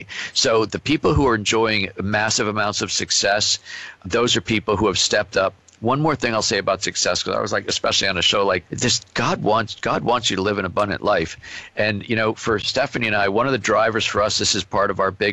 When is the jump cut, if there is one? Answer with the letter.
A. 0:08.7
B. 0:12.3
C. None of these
A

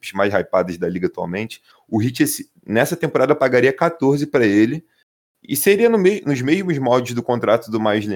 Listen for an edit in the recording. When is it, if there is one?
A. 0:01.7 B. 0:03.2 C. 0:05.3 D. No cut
A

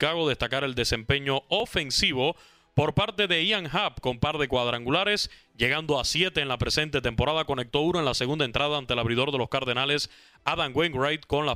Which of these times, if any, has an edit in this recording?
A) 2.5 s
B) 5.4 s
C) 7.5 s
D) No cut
D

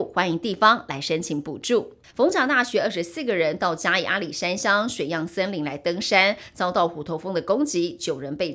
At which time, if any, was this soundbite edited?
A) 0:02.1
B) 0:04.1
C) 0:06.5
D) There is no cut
A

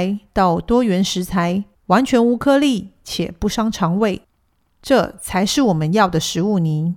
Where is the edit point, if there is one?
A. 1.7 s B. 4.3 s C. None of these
A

